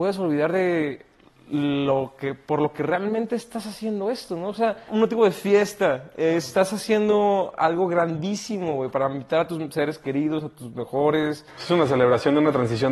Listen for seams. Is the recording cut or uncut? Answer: cut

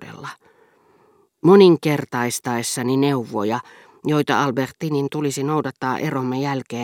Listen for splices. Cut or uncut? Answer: uncut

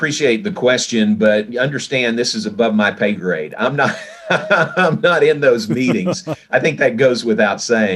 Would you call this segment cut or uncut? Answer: uncut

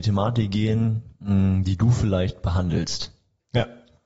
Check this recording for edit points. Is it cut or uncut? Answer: uncut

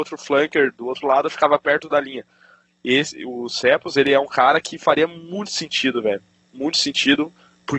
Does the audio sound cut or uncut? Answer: uncut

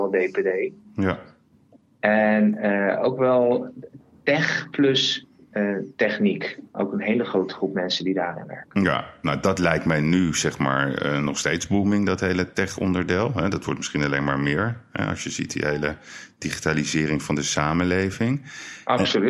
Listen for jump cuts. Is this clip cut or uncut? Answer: uncut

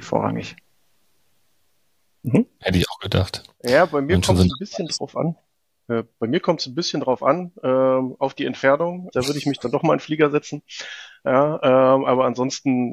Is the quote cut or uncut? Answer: cut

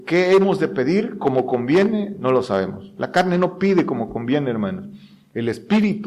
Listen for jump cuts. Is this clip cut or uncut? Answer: uncut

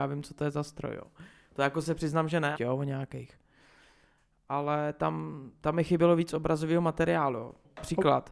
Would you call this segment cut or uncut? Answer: cut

